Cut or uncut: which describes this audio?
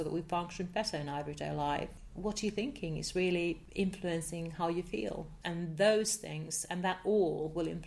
cut